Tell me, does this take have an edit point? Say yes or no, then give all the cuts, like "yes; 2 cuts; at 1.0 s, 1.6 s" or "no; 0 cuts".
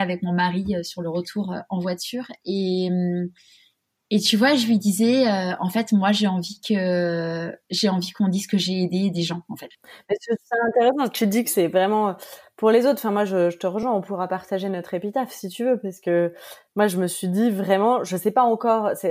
no; 0 cuts